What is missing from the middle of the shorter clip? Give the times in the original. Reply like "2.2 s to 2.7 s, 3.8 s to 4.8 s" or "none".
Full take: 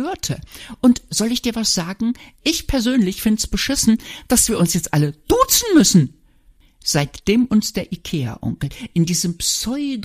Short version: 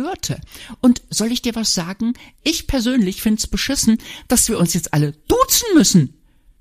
none